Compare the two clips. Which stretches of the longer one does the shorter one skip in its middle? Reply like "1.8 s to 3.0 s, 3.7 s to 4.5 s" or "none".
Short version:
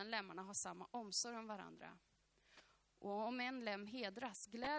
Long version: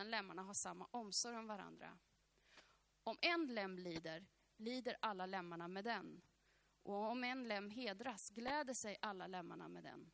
2.9 s to 6.8 s

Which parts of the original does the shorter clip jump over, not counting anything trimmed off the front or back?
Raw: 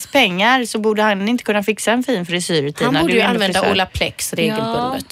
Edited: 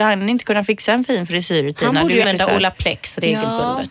3.2 s to 3.4 s

